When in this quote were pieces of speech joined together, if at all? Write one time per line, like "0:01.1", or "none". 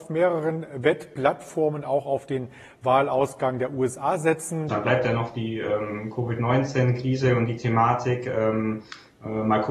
0:04.7